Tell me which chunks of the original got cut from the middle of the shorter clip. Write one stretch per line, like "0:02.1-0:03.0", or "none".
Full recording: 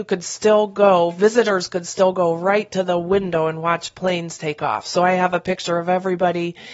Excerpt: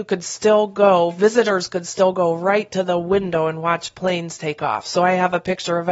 none